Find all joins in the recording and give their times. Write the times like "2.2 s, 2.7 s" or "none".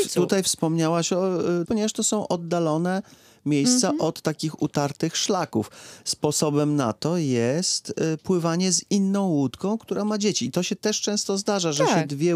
1.6 s